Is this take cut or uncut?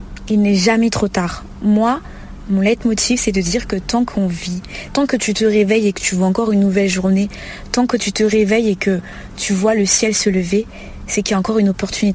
cut